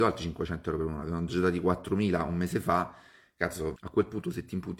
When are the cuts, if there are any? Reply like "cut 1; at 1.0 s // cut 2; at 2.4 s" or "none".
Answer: cut 1; at 3.8 s